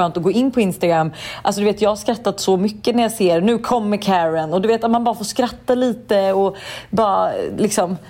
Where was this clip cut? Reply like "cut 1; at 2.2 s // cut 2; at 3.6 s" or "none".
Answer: none